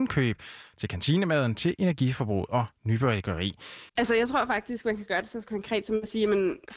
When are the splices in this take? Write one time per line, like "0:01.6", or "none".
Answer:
0:03.9